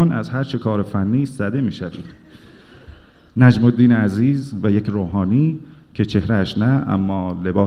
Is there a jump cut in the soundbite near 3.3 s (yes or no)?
yes